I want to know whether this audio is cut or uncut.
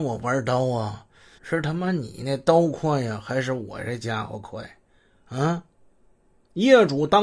cut